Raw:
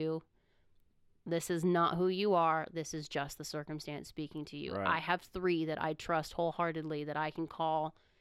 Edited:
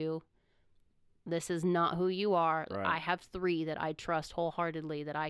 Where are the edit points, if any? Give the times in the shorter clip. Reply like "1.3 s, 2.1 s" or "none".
2.7 s